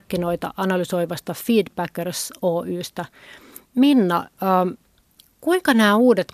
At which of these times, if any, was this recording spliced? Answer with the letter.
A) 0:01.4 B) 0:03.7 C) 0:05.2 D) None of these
B